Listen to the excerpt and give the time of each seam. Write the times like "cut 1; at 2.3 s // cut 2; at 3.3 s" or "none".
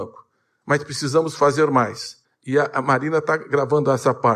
cut 1; at 2.2 s